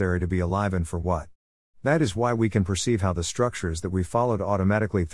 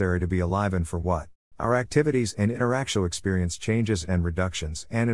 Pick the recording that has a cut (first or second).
second